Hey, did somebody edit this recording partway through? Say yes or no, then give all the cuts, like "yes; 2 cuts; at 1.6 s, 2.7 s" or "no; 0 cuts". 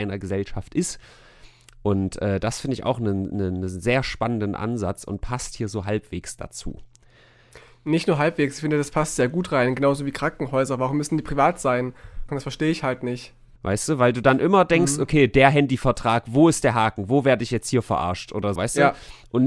yes; 3 cuts; at 12.3 s, 13.6 s, 18.6 s